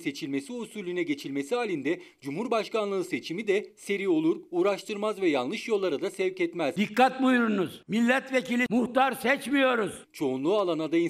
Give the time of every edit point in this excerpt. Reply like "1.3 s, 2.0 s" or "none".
8.7 s, 10.0 s

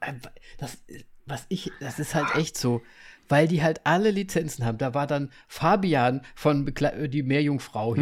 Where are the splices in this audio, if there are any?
none

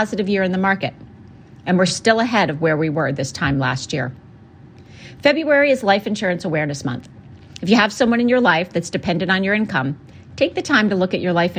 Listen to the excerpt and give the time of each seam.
none

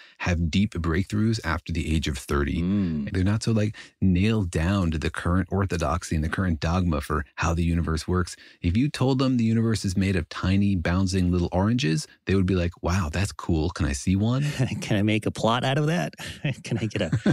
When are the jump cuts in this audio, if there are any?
3.1 s

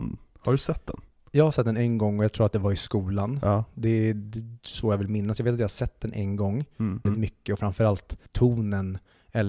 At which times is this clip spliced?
7.1 s, 8.3 s

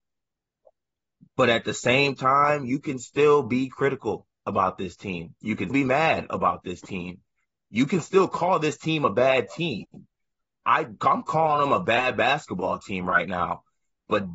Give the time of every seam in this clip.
5.7 s

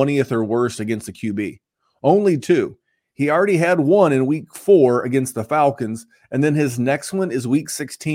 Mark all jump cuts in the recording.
none

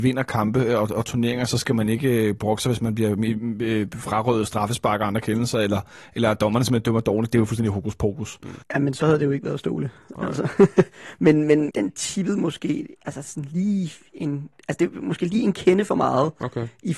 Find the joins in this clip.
8.6 s, 11.7 s

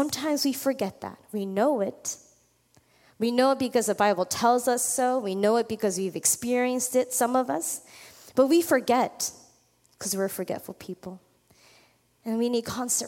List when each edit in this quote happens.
none

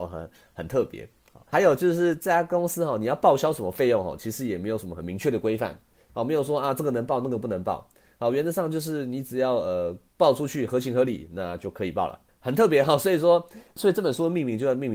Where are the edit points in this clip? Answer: none

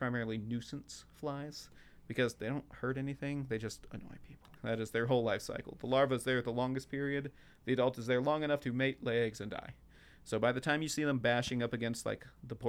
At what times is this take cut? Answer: 4.5 s

